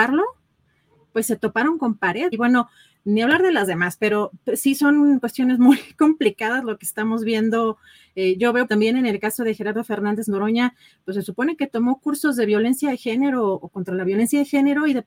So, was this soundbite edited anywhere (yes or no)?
yes